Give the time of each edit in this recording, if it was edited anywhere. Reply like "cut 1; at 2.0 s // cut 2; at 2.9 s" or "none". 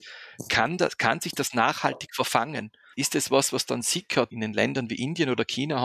cut 1; at 2.9 s // cut 2; at 4.3 s

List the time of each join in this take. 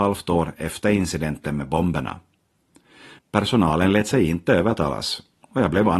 cut 1; at 3.2 s

